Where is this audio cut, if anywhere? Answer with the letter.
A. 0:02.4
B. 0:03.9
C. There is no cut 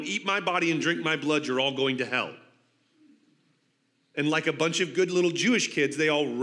C